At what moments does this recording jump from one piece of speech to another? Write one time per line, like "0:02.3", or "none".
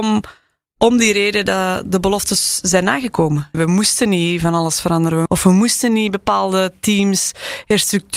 0:03.5
0:05.3